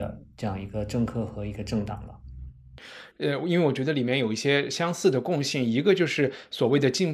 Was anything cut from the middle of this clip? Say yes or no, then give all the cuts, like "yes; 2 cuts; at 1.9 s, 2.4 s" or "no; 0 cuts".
yes; 1 cut; at 3.1 s